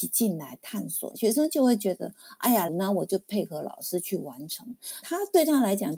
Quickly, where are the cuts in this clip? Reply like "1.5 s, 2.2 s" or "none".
1.1 s, 2.7 s, 5.0 s